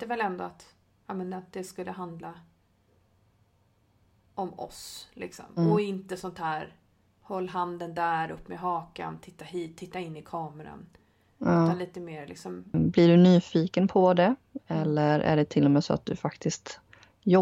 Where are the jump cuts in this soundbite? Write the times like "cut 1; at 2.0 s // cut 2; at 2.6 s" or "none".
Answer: cut 1; at 12.7 s